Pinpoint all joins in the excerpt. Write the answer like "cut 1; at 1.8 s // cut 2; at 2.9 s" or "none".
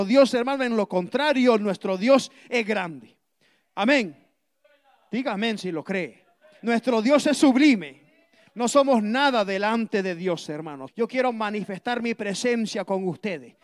cut 1; at 6.6 s // cut 2; at 8.5 s // cut 3; at 10.9 s